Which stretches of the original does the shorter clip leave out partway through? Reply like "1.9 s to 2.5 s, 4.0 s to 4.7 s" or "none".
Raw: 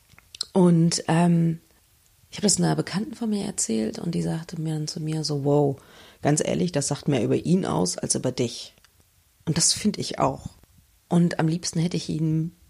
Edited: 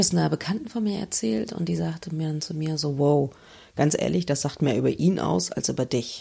none